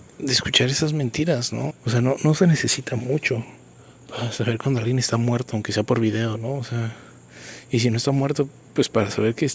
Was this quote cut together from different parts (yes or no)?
yes